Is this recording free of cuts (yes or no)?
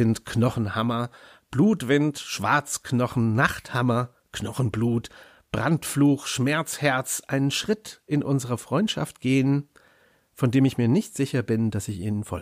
yes